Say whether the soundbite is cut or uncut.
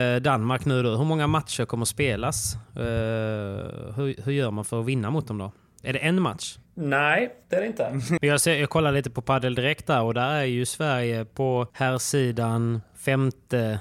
cut